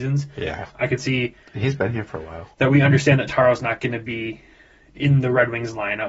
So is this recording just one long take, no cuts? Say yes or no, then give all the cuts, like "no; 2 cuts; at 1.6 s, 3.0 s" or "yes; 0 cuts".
yes; 0 cuts